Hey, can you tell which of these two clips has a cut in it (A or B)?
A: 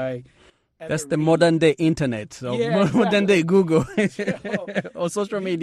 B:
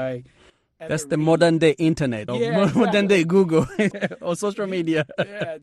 B